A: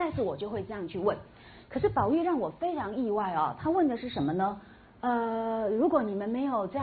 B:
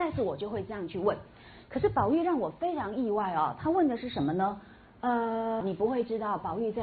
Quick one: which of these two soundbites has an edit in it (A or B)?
B